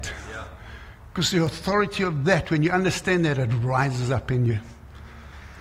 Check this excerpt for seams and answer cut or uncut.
uncut